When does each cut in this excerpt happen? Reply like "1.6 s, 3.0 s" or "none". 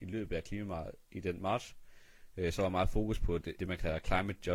3.6 s